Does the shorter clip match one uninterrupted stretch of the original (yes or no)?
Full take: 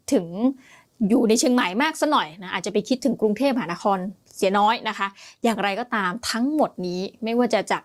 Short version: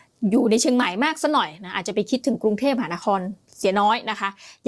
yes